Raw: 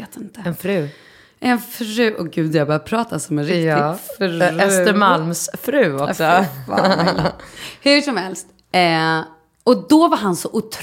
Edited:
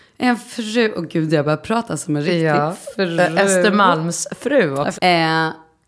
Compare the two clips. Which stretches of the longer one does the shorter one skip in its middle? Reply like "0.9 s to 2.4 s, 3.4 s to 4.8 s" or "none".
6.2 s to 8.7 s